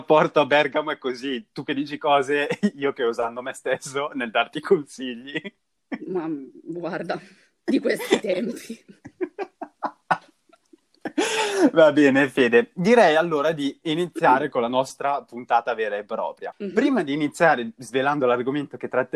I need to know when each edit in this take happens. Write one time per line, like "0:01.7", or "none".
none